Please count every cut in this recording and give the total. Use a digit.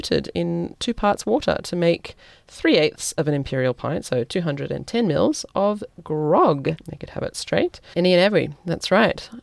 2